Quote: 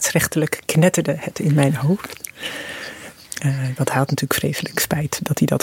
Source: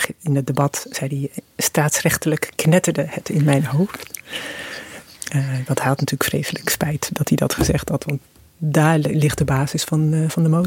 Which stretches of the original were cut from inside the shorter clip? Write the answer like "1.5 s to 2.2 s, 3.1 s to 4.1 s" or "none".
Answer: none

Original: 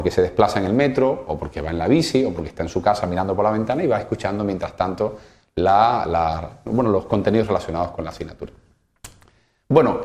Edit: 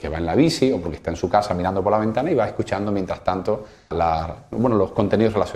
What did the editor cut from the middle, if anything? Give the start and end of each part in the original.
5.4 s to 6.0 s

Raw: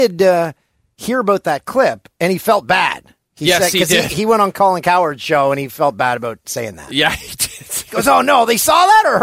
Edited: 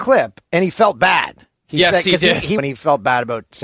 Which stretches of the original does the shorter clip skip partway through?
4.3 s to 5.5 s

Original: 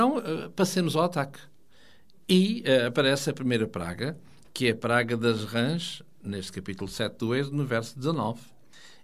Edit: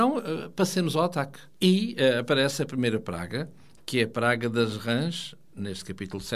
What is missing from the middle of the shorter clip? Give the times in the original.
1.5 s to 2.2 s

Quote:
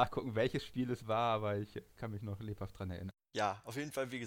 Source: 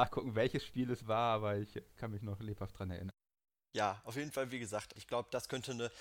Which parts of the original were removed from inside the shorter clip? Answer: 3.2 s to 3.6 s

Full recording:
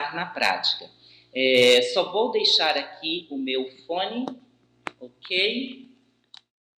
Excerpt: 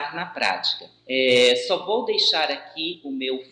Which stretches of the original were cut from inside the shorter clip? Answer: 1.0 s to 1.3 s

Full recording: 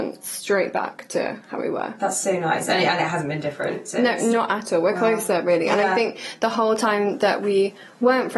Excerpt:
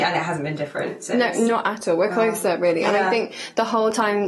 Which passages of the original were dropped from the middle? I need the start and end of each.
none

